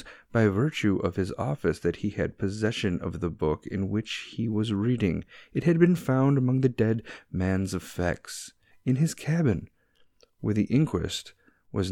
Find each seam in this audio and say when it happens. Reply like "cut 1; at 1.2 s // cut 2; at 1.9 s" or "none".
none

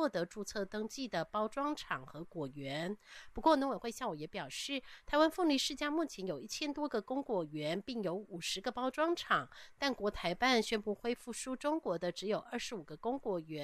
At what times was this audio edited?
none

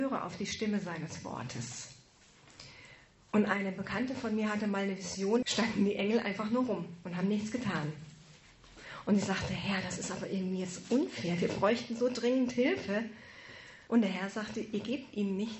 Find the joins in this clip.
cut 1; at 5.4 s // cut 2; at 13.9 s

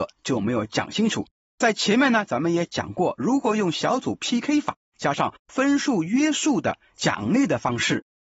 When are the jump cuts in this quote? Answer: none

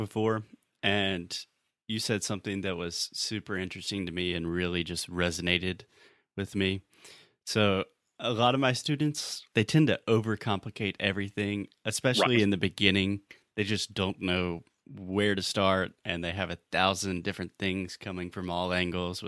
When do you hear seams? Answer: none

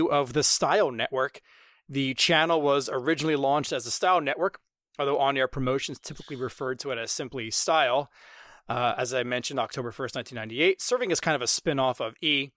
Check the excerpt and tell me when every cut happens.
none

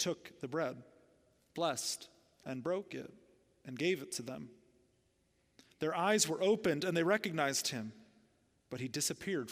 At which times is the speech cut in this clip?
none

